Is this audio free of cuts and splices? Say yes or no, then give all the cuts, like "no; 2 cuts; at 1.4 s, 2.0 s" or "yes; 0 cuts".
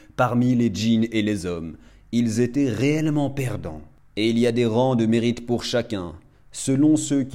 yes; 0 cuts